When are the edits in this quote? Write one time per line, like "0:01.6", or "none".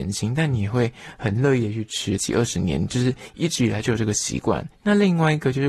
0:02.2
0:04.7